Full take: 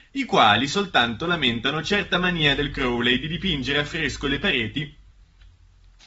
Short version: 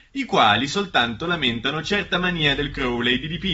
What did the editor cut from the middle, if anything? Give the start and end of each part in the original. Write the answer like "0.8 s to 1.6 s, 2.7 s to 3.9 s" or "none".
none

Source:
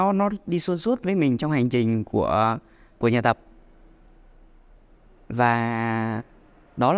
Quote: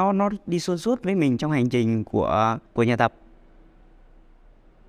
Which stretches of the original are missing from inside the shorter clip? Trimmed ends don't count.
2.7 s to 2.9 s

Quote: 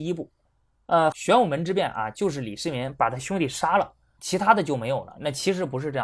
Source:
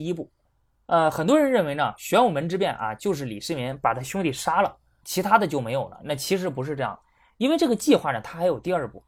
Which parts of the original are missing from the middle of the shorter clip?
1.1 s to 2.0 s

